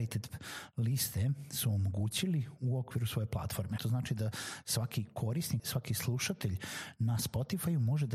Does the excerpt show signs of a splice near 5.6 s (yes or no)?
yes